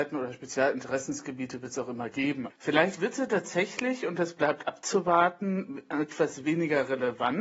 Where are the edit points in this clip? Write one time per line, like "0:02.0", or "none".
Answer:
0:02.5

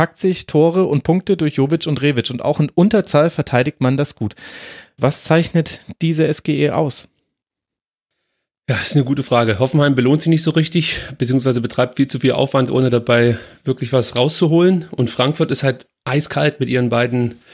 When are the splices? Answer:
0:05.0

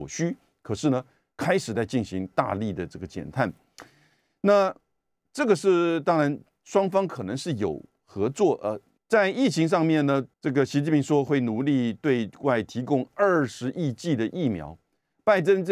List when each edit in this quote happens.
0:09.0
0:10.3

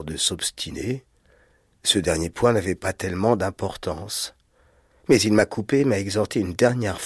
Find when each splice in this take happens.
none

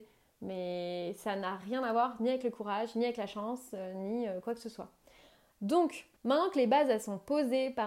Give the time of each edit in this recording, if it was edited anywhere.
0:06.2

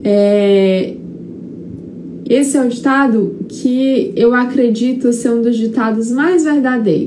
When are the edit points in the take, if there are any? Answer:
0:02.2

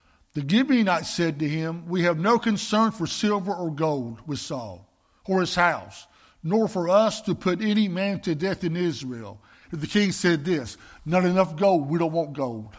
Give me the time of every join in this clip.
0:09.6

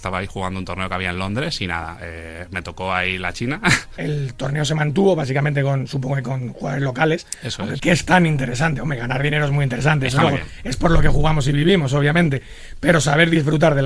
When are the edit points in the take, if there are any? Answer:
0:04.0
0:07.8

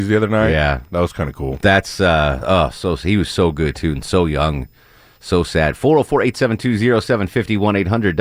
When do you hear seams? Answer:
none

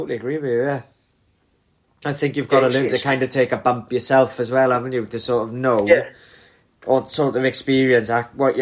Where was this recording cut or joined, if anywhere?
none

